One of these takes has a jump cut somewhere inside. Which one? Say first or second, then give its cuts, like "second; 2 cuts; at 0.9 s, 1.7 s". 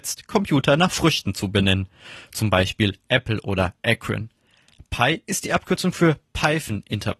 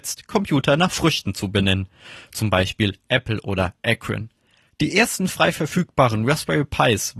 second; 1 cut; at 4.6 s